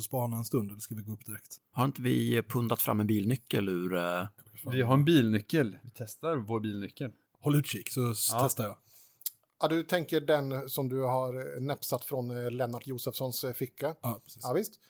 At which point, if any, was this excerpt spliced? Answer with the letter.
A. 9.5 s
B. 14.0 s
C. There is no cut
C